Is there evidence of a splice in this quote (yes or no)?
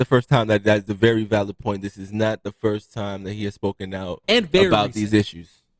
no